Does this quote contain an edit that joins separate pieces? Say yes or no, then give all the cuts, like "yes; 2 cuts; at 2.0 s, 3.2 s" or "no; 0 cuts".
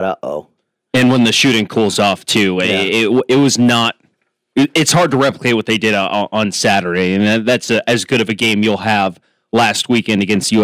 no; 0 cuts